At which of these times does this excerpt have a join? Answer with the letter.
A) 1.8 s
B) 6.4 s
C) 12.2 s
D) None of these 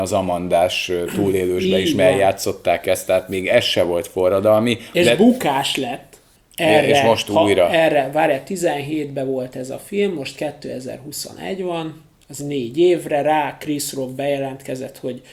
B